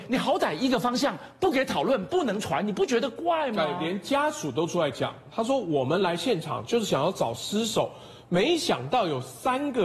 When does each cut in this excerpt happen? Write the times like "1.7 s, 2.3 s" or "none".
none

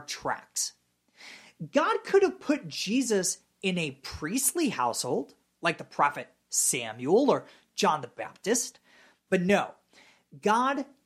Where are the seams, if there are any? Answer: 9.3 s

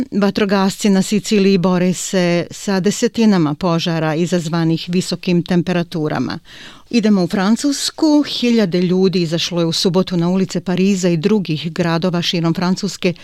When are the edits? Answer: 6.9 s

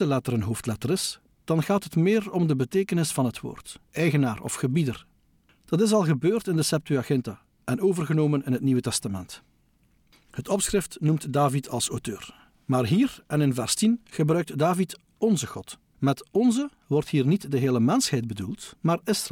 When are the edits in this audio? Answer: 3.8 s

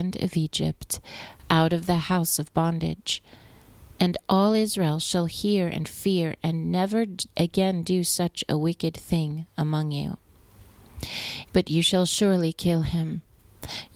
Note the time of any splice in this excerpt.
11.4 s

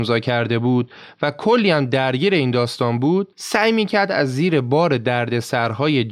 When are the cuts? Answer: 3.3 s

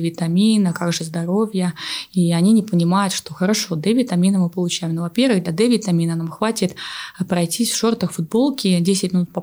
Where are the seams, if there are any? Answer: none

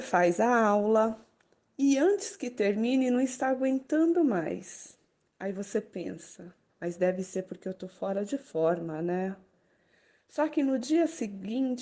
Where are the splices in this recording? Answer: 6.7 s

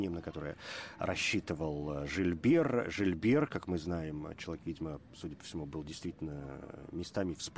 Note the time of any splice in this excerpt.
none

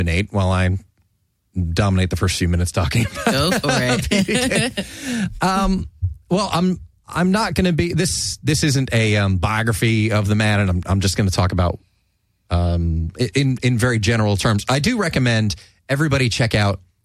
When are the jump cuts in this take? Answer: none

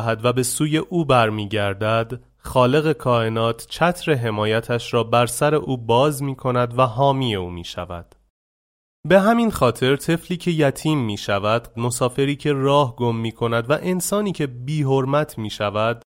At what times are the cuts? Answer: 11.7 s

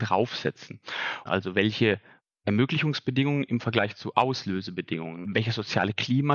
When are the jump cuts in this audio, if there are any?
1.3 s, 5.2 s

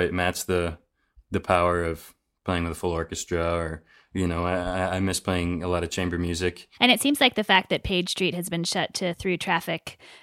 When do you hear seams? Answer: 6.8 s

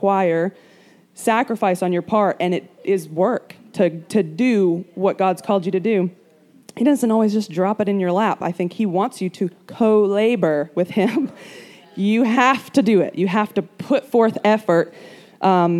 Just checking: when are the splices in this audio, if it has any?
none

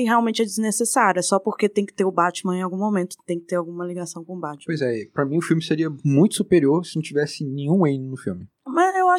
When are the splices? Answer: none

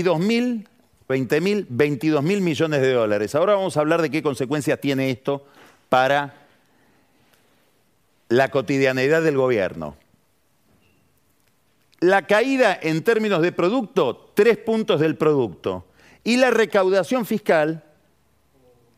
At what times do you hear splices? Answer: 1.1 s

